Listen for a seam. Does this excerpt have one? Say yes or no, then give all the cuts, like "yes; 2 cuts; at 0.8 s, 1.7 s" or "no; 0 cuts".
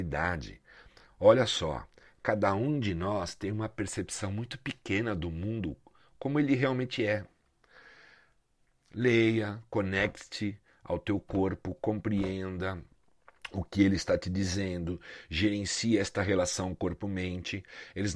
no; 0 cuts